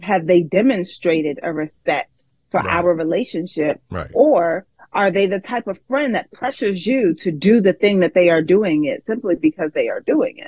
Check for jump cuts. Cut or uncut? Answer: uncut